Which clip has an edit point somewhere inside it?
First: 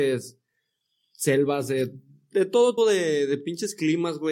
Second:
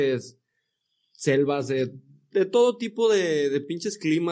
first; 1 cut; at 2.8 s

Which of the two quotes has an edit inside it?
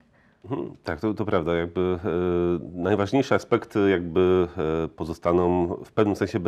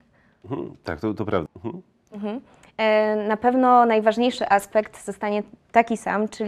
second; 1 cut; at 1.5 s

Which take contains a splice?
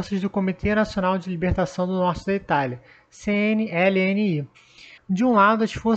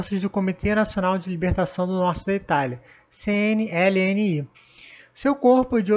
first; 1 cut; at 5.0 s

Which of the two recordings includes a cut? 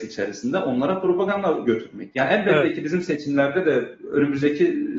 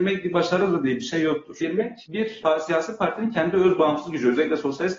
second; 1 cut; at 1.6 s

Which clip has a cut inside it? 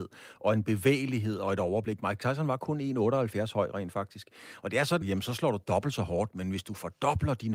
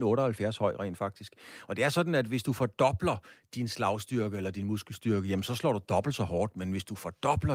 first; 1 cut; at 5.0 s

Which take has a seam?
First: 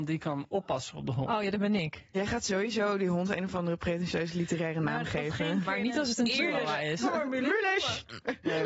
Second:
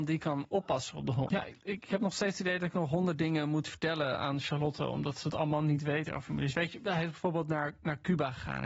second; 1 cut; at 1.3 s

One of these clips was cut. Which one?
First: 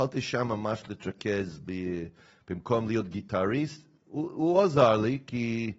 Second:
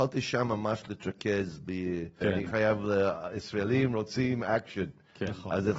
second; 1 cut; at 2.2 s

